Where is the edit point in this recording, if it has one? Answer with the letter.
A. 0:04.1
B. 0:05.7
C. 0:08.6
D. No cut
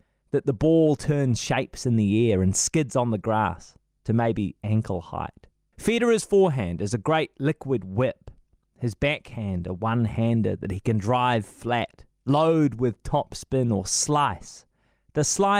B